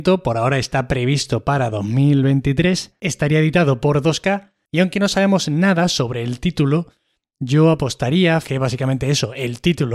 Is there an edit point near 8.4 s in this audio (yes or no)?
yes